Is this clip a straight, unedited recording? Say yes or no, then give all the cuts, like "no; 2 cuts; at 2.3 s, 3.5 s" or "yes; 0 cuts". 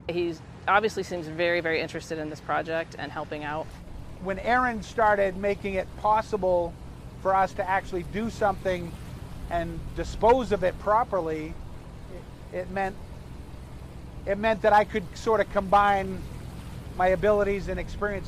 yes; 0 cuts